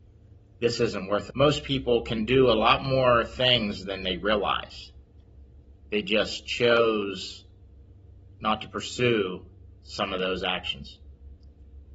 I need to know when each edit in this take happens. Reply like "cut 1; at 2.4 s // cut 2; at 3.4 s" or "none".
cut 1; at 1.3 s